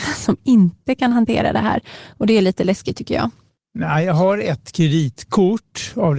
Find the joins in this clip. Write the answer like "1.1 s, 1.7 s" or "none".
3.6 s